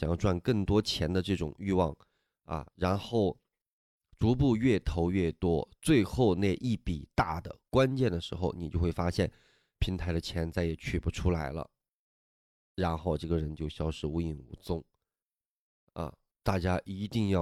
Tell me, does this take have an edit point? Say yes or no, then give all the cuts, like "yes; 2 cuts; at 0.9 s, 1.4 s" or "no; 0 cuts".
no; 0 cuts